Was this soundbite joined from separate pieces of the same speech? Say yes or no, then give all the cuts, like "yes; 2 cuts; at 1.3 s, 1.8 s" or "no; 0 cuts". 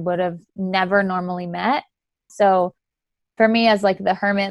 yes; 1 cut; at 2.3 s